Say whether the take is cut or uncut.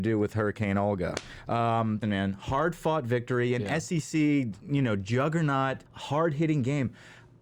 cut